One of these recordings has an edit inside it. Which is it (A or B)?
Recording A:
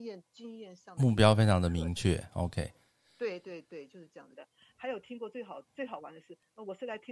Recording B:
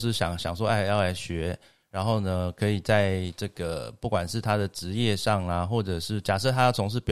A